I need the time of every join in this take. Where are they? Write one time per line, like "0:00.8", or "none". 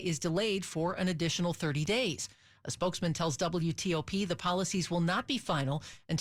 none